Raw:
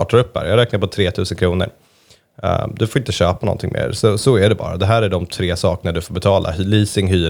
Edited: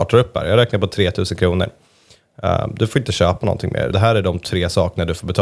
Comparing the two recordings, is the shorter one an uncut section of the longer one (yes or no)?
no